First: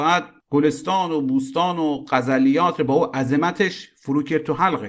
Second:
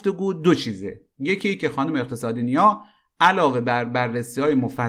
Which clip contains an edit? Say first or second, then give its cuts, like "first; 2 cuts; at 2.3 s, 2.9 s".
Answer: second; 1 cut; at 1.1 s